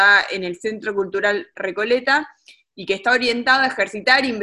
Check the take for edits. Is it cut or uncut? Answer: uncut